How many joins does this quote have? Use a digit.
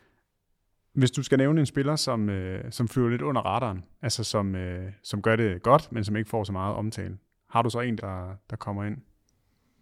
1